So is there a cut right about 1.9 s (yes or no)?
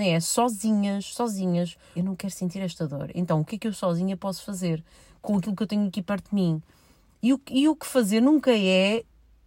yes